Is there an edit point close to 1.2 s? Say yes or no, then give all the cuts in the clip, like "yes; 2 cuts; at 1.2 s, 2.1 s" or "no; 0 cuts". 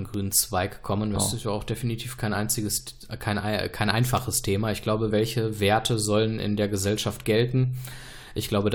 yes; 2 cuts; at 1.2 s, 5.1 s